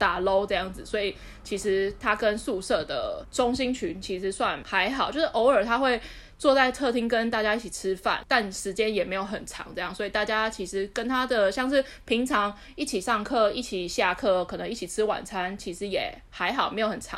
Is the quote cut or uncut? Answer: uncut